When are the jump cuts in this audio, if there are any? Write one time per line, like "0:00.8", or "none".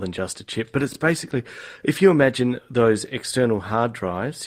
none